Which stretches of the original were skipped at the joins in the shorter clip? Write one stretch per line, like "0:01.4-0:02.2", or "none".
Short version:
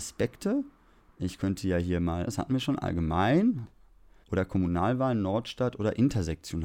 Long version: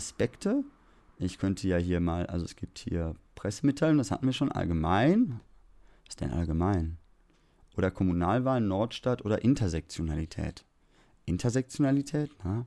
0:02.3-0:04.0
0:06.0-0:07.7